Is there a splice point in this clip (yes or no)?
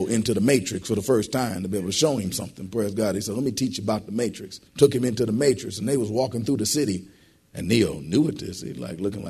yes